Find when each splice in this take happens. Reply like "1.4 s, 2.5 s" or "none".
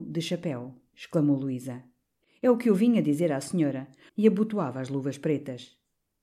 0.9 s, 4.1 s